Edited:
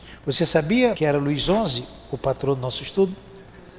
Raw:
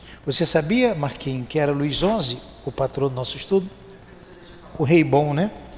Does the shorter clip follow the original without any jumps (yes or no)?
no